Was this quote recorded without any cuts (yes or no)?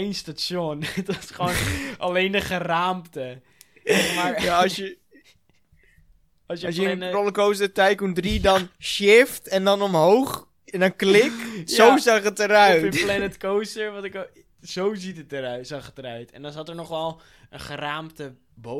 yes